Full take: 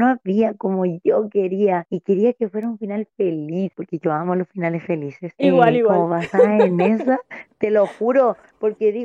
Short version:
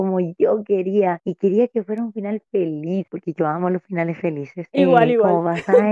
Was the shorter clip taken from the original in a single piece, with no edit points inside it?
yes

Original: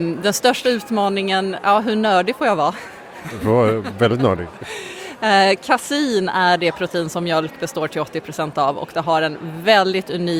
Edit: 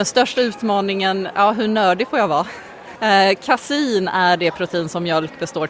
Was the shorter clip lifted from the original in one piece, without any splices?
no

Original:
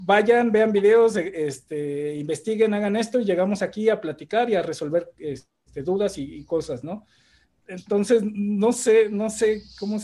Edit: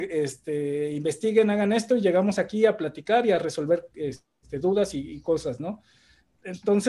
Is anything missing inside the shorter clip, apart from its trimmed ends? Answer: no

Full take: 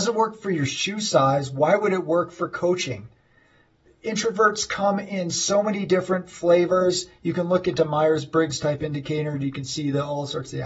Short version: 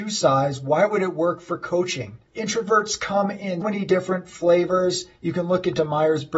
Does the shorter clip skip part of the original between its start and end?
yes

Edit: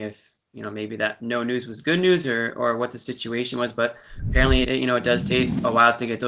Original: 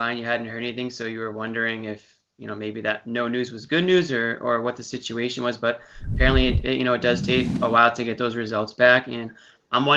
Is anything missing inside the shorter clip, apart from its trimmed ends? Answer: yes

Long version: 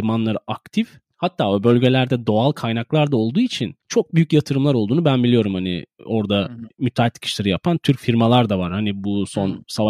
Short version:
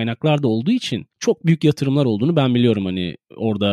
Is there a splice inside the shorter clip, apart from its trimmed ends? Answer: no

